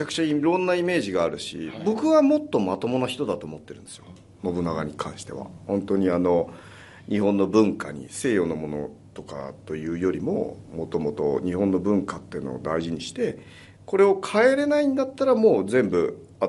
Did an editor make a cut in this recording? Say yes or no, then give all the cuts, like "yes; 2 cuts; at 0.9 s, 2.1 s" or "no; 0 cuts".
no; 0 cuts